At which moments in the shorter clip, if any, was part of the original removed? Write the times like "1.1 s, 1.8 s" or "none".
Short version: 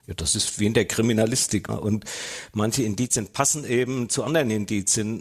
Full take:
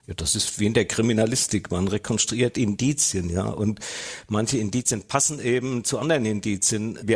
1.7 s